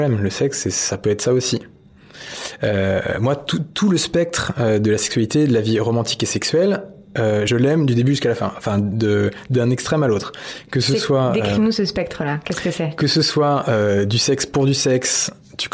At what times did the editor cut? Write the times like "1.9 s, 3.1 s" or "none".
none